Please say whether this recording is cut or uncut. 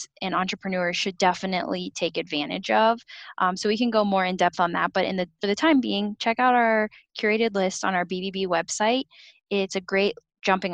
uncut